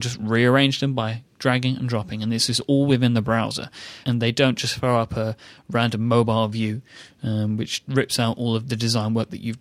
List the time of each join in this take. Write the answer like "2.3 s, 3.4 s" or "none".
4.0 s